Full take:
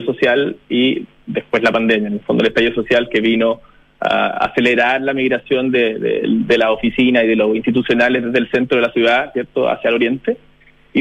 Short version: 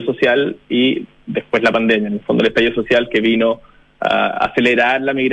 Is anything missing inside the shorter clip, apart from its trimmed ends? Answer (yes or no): no